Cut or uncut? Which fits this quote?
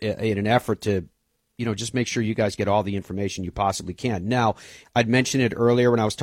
cut